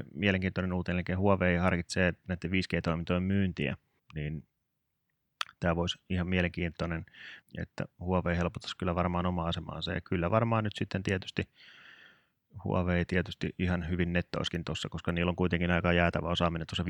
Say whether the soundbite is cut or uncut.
cut